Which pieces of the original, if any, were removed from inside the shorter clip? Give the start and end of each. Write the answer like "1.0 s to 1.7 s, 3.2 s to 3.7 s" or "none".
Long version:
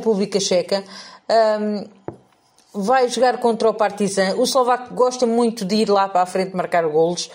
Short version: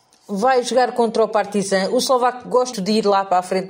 5.2 s to 5.6 s